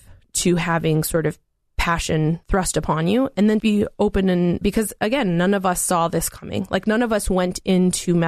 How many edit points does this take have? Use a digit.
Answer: 2